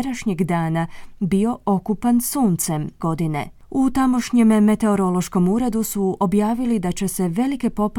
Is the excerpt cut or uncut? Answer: cut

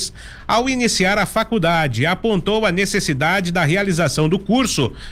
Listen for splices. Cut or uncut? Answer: uncut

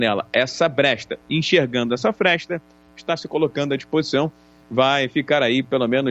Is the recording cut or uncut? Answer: uncut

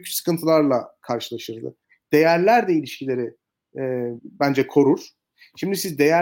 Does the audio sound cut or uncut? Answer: cut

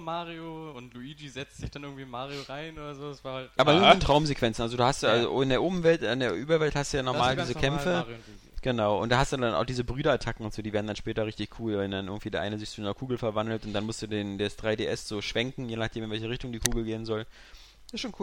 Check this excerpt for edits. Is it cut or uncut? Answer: uncut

